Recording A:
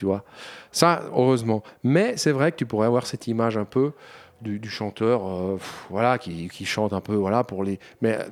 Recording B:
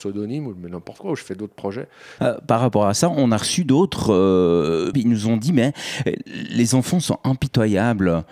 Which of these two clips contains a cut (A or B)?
B